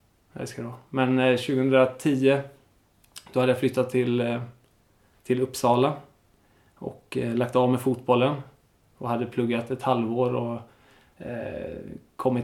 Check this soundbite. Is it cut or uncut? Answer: uncut